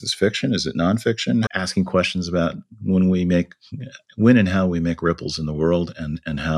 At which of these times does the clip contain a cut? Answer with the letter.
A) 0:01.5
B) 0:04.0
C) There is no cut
A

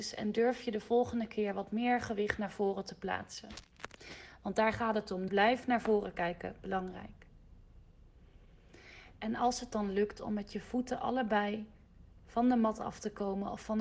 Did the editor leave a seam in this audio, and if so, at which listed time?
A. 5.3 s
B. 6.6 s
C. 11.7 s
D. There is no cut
A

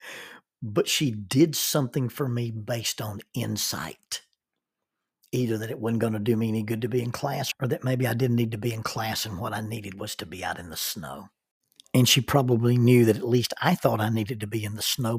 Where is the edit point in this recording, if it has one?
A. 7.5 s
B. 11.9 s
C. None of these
A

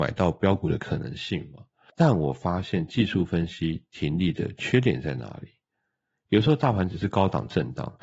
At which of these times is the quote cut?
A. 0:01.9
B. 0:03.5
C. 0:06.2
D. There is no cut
A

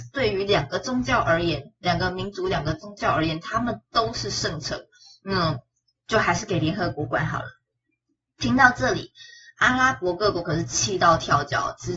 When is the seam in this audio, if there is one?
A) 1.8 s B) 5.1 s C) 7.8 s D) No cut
D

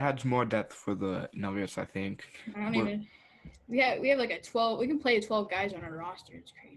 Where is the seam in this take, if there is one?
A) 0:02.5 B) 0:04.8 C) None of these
C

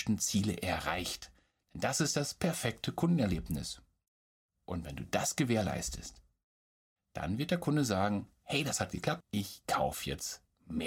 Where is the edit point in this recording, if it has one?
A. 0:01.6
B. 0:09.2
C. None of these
B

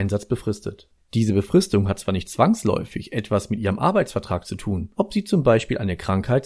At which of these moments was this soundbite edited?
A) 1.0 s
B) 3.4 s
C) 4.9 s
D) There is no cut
C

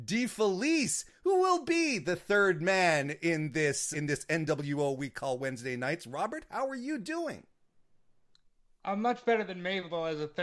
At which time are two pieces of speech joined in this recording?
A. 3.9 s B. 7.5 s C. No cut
A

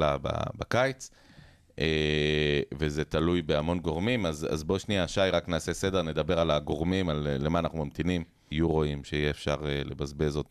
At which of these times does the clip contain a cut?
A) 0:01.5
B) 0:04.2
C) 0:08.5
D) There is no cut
C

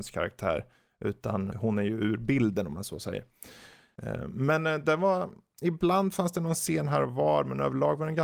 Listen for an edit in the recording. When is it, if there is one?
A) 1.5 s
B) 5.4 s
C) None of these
A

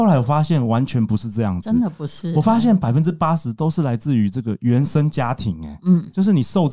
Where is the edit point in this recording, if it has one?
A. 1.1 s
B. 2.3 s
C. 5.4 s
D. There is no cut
D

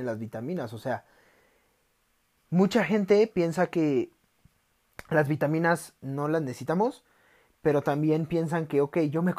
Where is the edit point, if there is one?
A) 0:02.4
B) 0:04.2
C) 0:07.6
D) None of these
A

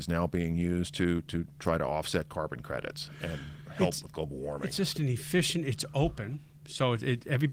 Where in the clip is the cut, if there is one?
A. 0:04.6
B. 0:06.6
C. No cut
C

